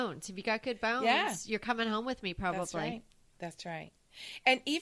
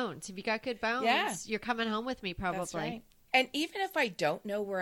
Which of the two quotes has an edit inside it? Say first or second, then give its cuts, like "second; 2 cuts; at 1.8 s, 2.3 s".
second; 1 cut; at 3.3 s